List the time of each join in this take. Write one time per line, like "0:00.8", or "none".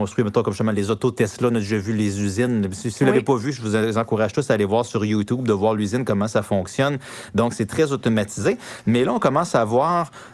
none